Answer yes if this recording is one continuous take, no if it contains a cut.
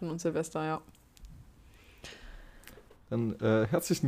yes